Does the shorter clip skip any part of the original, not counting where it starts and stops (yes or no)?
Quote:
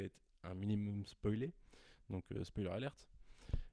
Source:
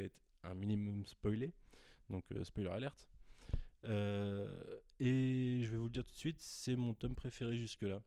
no